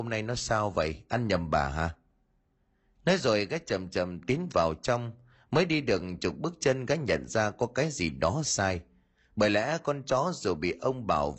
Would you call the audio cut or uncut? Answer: cut